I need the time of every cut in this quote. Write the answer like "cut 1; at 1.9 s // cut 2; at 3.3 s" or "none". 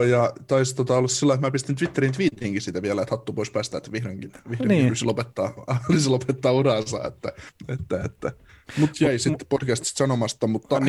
none